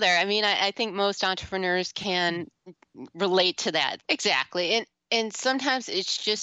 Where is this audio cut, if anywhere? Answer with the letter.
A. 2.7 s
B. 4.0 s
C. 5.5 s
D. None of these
B